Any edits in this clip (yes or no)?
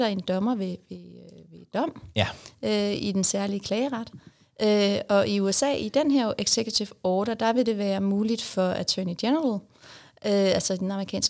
no